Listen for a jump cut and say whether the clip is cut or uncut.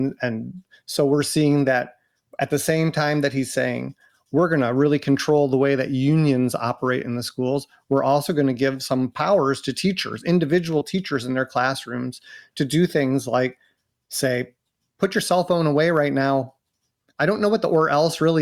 uncut